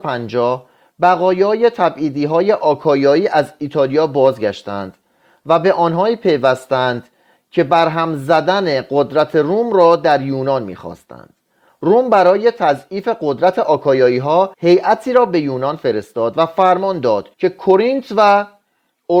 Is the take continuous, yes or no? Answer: no